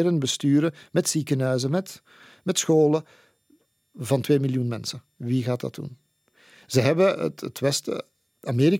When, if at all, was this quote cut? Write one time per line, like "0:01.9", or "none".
none